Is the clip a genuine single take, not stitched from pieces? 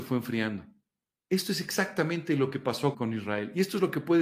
no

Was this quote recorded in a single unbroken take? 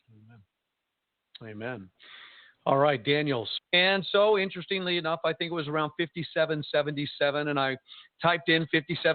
no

